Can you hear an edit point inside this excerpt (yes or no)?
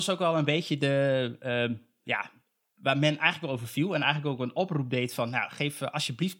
no